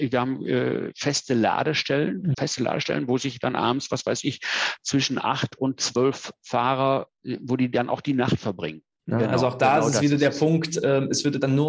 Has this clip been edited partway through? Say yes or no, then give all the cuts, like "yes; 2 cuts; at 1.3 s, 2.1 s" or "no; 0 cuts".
yes; 2 cuts; at 2.3 s, 9.0 s